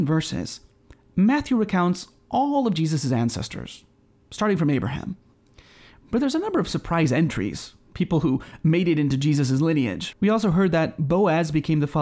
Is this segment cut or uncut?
cut